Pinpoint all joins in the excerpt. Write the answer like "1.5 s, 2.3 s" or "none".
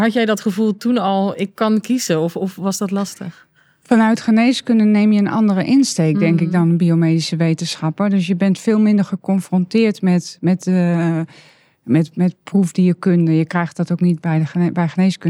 none